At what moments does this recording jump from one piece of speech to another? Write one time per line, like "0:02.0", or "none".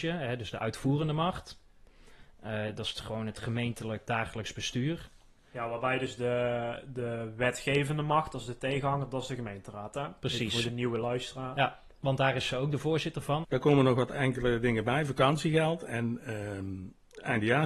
0:04.1
0:13.4